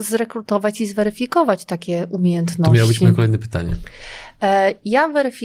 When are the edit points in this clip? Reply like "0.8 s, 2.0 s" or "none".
none